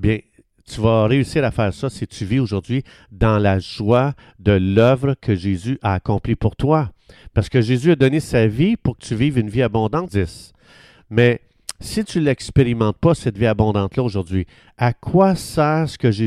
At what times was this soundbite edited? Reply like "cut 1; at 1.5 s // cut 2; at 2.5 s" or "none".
cut 1; at 10.1 s